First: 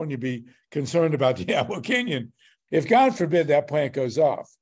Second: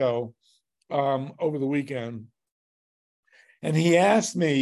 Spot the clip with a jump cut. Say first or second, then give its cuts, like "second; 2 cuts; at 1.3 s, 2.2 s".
first; 1 cut; at 2.7 s